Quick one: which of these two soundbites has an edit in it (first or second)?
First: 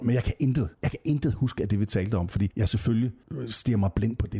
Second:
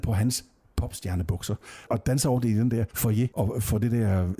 second